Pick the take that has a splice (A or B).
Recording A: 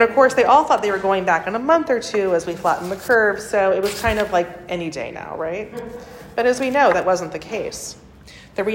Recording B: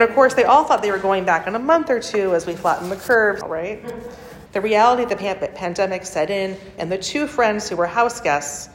B